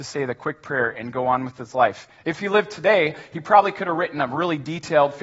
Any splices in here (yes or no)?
yes